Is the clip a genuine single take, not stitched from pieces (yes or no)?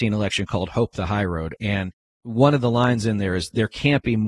yes